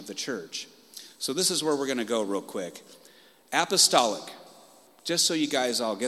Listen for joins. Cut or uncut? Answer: uncut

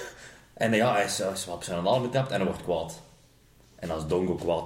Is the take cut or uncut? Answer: uncut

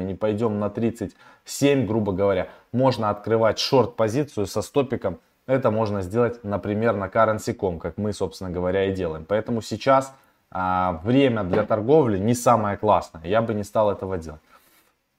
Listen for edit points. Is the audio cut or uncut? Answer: uncut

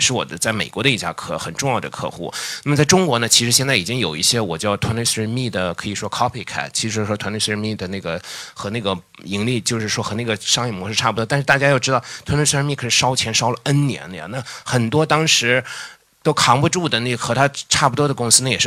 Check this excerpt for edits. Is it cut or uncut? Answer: uncut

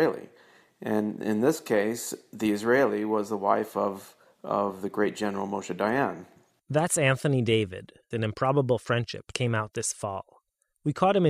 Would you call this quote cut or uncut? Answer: cut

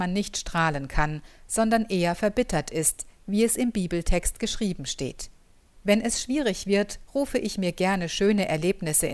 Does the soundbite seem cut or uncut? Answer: cut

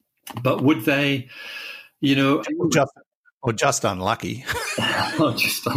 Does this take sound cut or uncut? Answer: cut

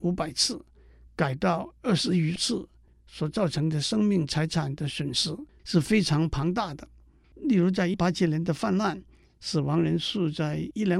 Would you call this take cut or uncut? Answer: cut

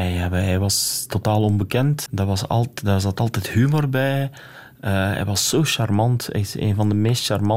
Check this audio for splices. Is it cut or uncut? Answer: cut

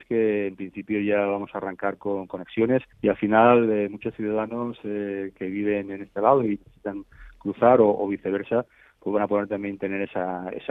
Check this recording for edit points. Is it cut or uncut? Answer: cut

